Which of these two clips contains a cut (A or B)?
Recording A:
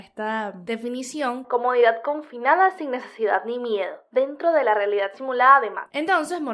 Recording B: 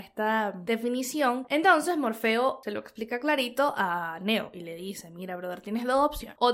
B